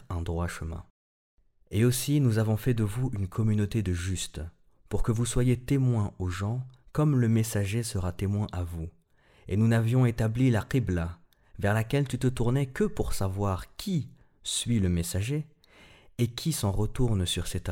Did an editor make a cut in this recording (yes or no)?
no